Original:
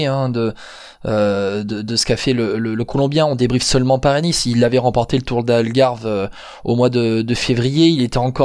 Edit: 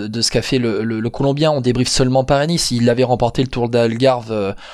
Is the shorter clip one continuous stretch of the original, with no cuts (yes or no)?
yes